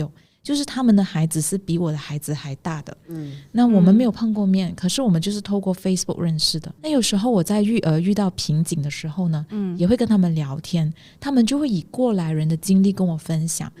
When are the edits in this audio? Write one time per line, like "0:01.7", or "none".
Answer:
0:06.8